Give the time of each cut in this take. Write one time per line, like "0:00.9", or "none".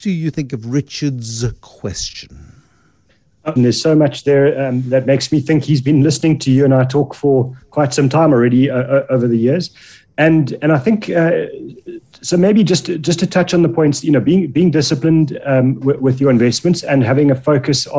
0:03.6

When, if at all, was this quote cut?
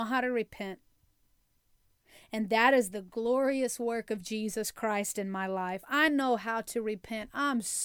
none

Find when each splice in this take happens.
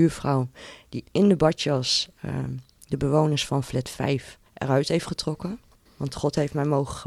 0:04.5
0:05.9

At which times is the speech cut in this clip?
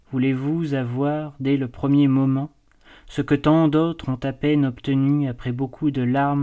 none

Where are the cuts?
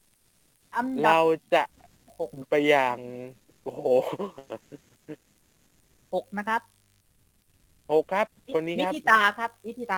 0:02.4

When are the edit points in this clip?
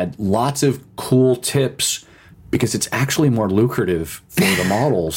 0:02.3

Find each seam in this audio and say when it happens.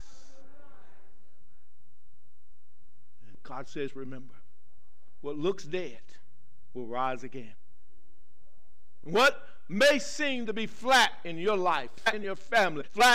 0:03.3
0:09.0
0:12.0

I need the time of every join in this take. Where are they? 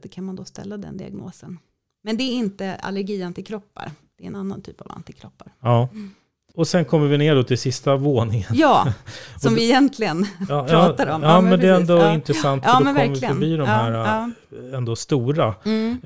none

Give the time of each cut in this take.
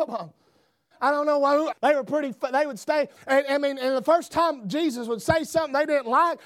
0:01.7
0:03.2

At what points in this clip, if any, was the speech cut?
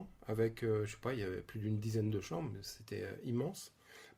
none

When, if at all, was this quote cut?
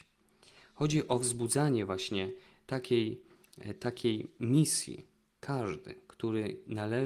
none

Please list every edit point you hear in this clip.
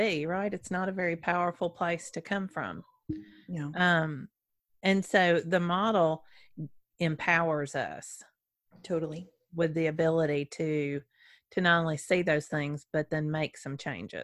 none

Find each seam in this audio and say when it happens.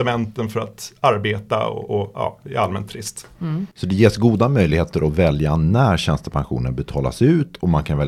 0:03.7

